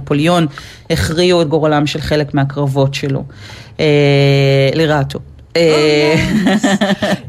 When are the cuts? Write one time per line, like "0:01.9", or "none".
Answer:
none